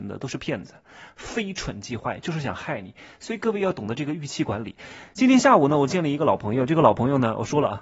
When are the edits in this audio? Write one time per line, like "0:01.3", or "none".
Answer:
none